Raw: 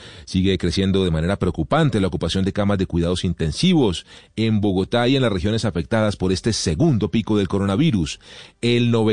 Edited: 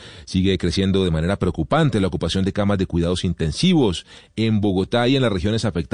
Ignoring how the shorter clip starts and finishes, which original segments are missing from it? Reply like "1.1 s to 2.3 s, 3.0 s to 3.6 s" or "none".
none